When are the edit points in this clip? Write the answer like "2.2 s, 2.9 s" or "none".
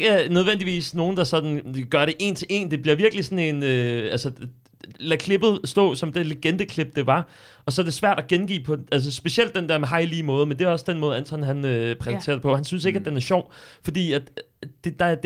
none